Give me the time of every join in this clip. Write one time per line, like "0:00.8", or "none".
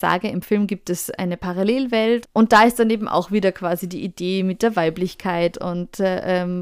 0:02.2
0:05.5